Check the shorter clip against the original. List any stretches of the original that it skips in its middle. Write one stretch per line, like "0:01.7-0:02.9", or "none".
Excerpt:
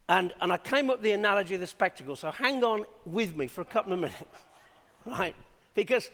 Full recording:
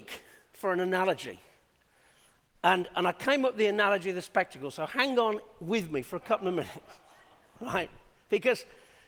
none